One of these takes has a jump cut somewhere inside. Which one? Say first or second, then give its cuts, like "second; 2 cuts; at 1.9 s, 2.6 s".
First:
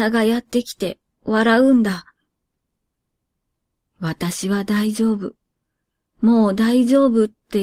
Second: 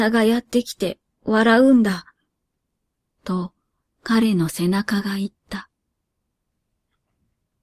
second; 1 cut; at 3.1 s